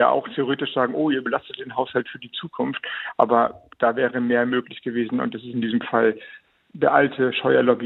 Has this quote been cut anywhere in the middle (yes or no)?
no